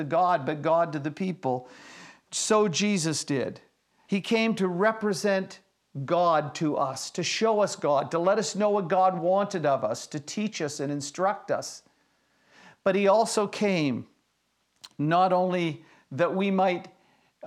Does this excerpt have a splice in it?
yes; 1 cut; at 4.1 s

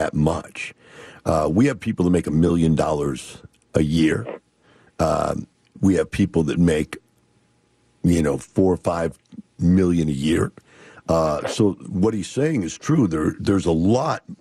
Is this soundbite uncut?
yes; 0 cuts

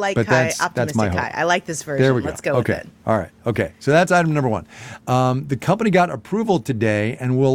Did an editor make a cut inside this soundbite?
yes; 1 cut; at 5.0 s

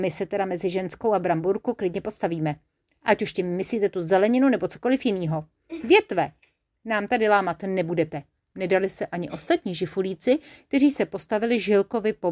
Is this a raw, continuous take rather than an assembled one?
yes; 0 cuts

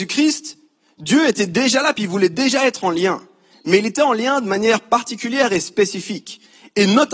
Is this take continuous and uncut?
yes; 0 cuts

